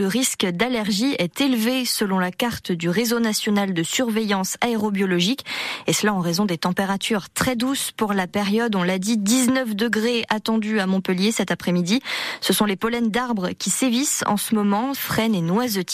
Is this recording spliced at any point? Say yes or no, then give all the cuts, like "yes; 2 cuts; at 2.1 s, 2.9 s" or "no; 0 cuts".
yes; 1 cut; at 14.9 s